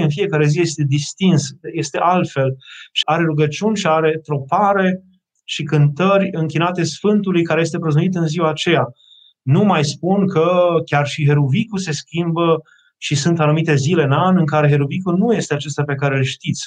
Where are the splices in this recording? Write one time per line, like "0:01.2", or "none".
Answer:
0:03.0